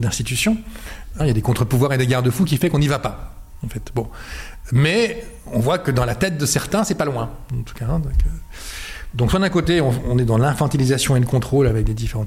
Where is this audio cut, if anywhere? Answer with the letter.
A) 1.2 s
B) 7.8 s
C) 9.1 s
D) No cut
A